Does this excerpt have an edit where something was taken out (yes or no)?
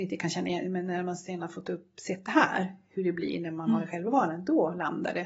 no